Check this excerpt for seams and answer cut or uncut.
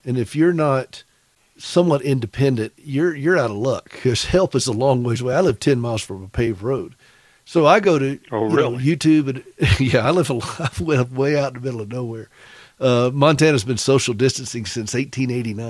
uncut